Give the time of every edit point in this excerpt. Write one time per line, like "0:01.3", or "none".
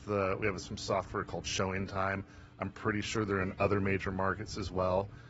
none